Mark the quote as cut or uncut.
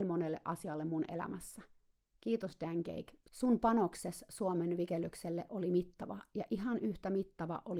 uncut